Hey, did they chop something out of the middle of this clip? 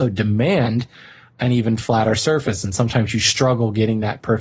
no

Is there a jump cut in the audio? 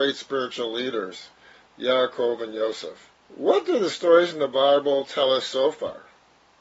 yes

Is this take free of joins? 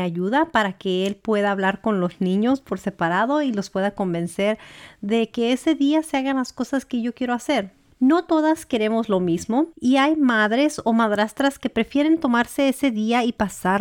no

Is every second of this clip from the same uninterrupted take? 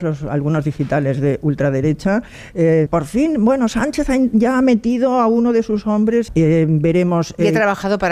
no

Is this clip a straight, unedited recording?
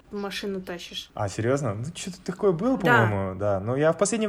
yes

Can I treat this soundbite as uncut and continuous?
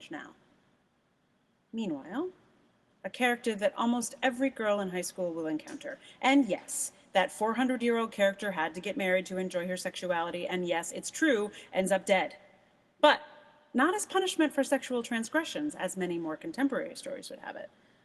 no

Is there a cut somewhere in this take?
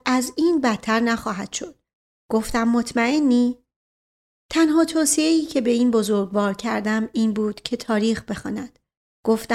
no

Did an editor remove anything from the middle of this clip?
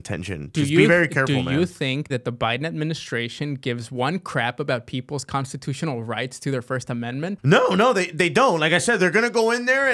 yes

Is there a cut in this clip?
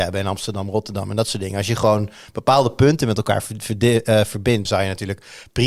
yes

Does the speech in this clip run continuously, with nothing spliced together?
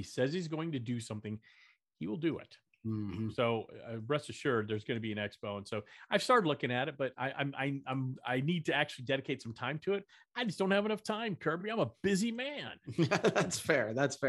yes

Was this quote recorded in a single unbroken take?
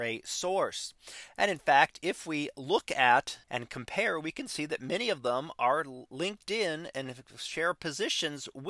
no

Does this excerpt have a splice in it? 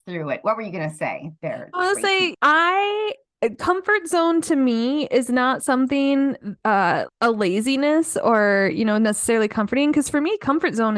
yes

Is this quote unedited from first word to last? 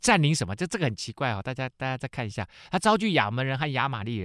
yes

